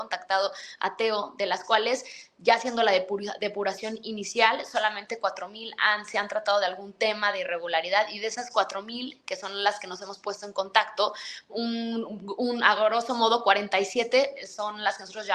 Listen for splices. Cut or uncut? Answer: cut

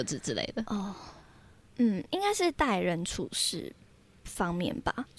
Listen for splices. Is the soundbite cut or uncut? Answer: uncut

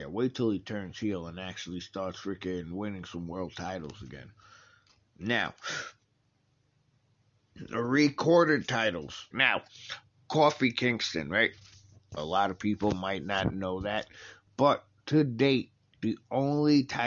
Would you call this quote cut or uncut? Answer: cut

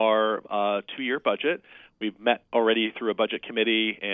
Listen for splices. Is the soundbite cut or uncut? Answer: uncut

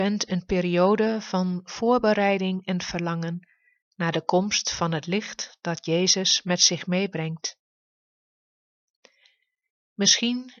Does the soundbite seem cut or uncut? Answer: uncut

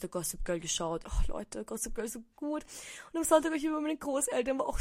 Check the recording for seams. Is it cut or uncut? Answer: cut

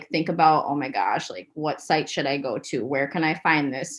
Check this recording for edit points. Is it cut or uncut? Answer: uncut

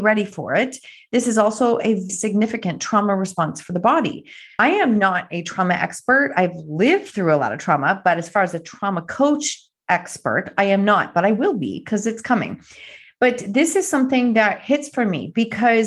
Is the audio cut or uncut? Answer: cut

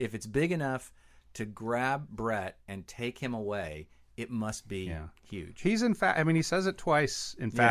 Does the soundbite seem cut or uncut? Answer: uncut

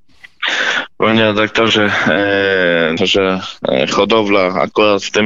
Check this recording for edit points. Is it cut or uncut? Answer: cut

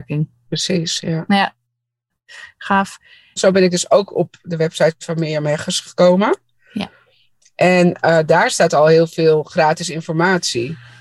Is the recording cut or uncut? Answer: cut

